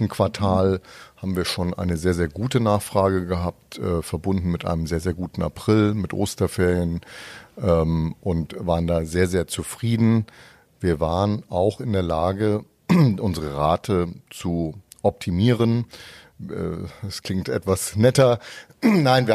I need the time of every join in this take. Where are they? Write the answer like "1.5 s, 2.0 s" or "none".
none